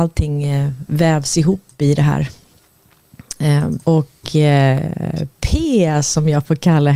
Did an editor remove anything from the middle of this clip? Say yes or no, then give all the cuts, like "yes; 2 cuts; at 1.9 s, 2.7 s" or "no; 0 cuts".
yes; 1 cut; at 3.8 s